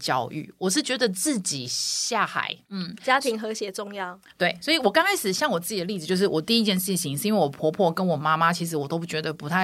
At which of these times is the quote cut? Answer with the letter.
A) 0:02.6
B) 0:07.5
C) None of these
A